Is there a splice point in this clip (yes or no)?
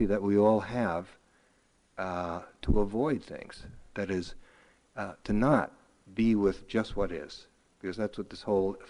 no